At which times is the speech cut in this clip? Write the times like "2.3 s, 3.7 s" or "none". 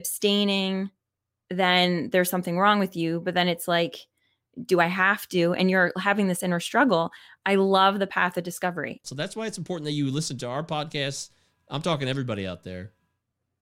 9.0 s